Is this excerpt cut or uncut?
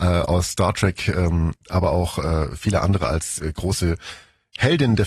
uncut